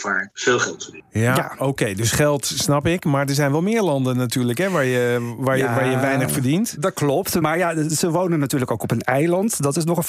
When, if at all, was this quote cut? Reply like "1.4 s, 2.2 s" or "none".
none